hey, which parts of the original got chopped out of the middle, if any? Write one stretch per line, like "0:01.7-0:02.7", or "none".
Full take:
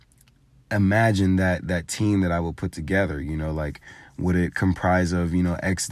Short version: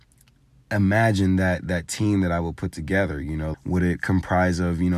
0:03.5-0:04.1

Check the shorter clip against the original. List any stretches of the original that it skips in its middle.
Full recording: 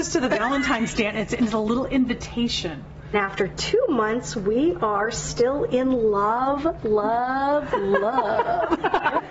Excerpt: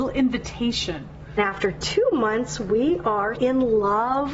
0:05.1-0:05.7

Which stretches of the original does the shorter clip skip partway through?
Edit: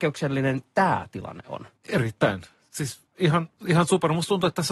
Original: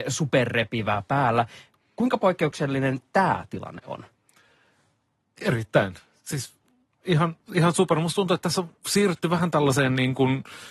0:04.1-0:05.3
0:06.6-0:06.9

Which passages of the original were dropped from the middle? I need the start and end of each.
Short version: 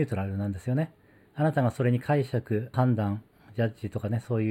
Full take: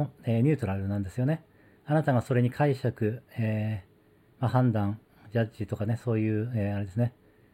0:03.2-0:04.5

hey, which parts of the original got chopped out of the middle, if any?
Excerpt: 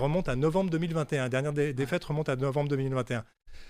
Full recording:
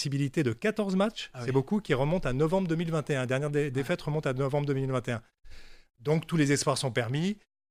none

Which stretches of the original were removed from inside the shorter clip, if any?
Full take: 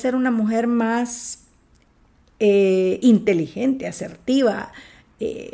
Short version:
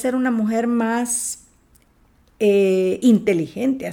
none

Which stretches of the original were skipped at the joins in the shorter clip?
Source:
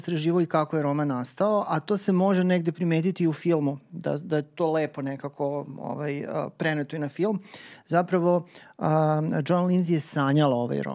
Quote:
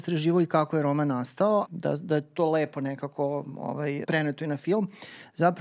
0:01.6-0:03.9
0:06.2-0:06.6

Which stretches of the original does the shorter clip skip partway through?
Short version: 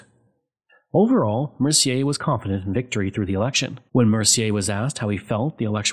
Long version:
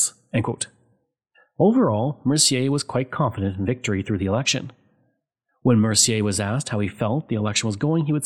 0:02.8-0:03.1
0:04.8-0:05.6

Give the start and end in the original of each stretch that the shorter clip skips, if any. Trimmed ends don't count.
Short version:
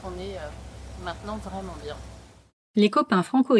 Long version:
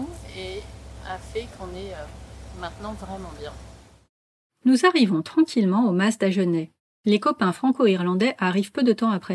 0:04.2-0:06.9

